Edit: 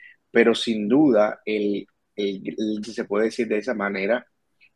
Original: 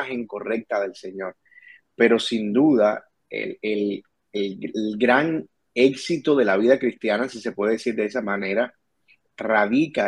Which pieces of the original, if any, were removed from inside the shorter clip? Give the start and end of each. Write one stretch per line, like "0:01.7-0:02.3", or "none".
0:03.1-0:03.6
0:05.0-0:07.3